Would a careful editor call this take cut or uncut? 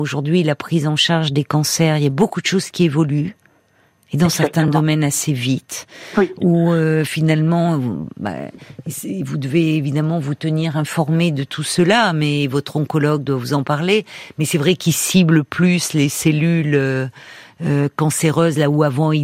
uncut